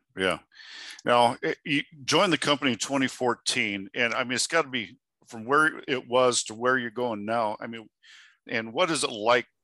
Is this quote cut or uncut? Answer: cut